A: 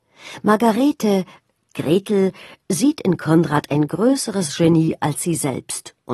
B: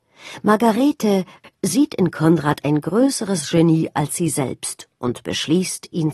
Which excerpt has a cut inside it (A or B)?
B